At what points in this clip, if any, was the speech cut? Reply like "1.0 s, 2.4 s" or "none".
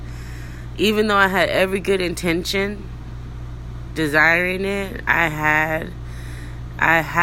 3.9 s

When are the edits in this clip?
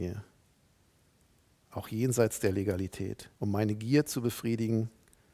1.6 s, 3.3 s

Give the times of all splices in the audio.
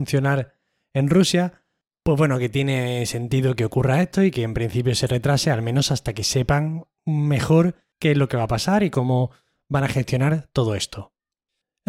none

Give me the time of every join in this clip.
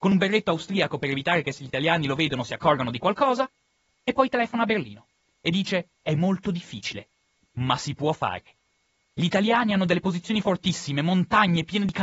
none

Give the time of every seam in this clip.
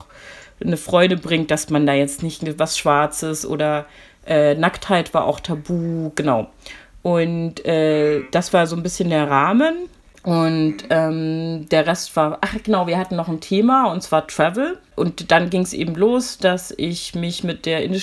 none

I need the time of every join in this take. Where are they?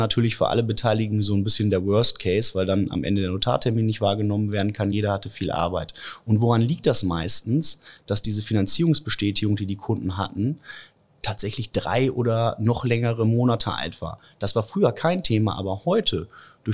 none

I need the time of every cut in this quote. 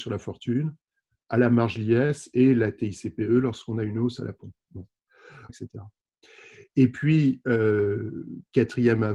5.5 s

